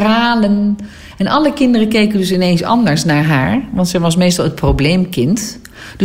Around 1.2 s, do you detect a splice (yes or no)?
no